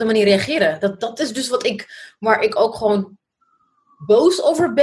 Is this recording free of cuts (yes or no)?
yes